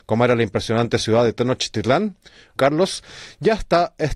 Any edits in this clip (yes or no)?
yes